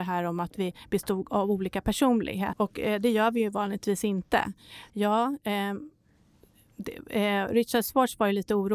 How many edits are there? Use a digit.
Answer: 2